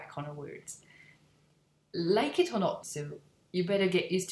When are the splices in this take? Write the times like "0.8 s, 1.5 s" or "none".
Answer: 2.8 s